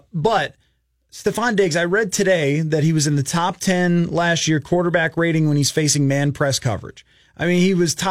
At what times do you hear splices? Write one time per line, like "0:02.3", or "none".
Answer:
0:07.2